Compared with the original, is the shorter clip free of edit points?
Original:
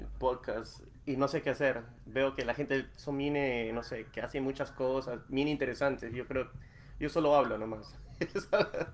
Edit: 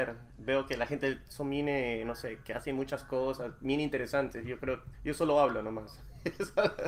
no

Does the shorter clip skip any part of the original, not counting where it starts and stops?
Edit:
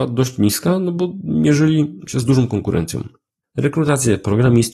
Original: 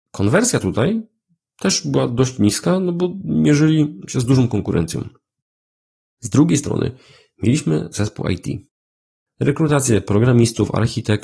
yes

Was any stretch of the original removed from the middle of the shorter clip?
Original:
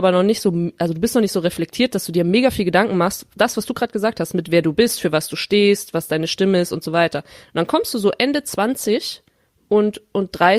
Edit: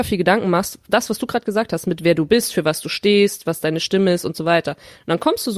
no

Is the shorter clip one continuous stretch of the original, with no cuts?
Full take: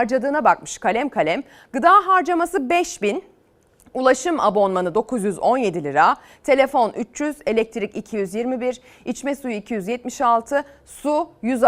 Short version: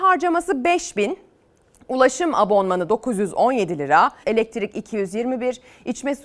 no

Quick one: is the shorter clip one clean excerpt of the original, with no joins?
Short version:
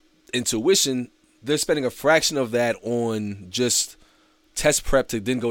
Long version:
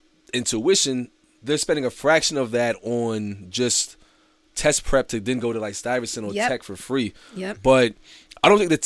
yes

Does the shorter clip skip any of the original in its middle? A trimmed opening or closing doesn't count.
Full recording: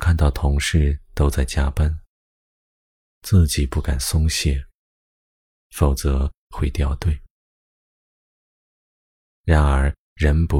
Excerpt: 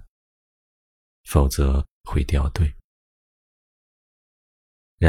yes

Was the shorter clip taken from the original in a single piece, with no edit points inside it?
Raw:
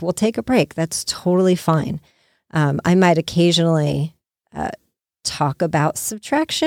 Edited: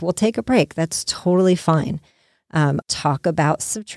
no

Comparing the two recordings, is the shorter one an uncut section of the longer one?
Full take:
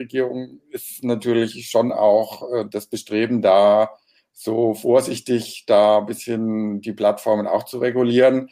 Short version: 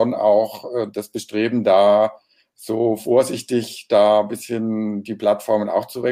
yes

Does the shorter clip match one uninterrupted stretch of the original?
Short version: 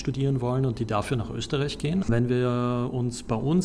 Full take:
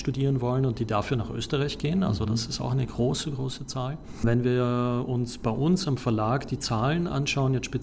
no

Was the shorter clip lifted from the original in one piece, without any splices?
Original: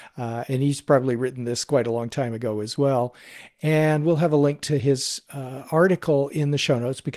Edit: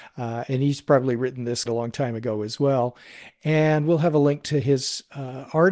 no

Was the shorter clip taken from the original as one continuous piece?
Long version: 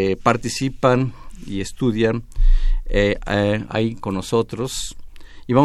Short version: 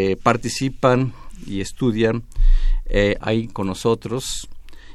no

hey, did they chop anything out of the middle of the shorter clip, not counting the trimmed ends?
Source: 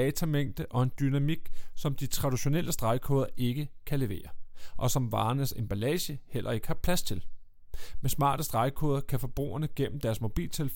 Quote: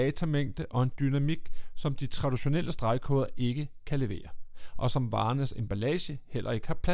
no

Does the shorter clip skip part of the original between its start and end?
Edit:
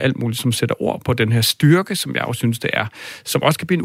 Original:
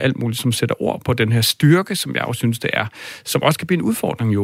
no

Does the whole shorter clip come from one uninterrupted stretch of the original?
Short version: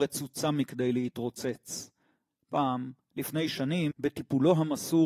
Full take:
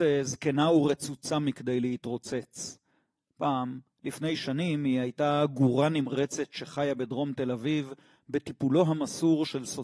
no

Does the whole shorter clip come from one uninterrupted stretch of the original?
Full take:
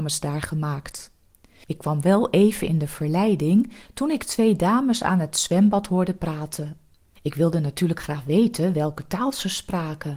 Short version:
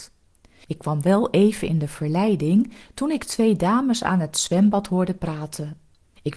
yes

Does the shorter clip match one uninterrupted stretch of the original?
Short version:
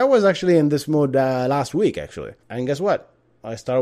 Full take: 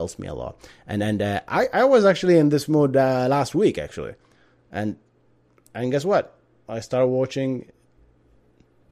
no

